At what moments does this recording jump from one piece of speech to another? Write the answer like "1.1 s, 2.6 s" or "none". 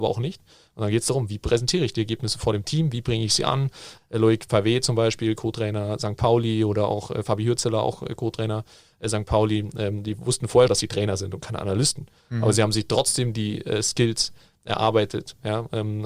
4.0 s, 10.7 s